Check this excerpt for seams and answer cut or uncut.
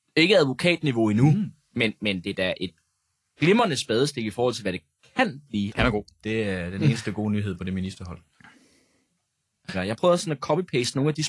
cut